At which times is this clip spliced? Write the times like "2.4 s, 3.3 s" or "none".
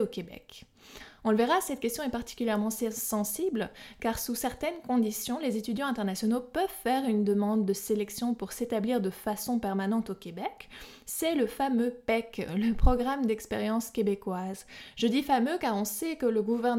none